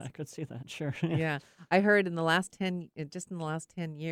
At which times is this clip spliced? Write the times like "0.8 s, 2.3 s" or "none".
none